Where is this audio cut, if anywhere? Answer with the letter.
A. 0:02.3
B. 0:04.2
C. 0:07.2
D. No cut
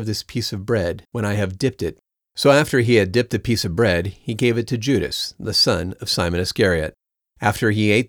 D